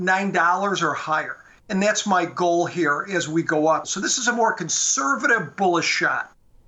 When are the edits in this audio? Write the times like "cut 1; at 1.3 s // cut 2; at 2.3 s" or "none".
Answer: cut 1; at 3.8 s